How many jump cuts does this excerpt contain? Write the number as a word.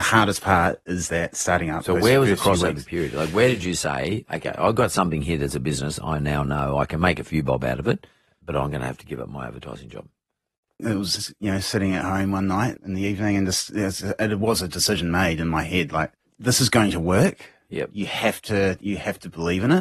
two